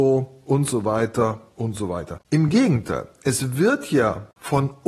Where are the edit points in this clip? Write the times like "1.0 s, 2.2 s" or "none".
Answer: 2.2 s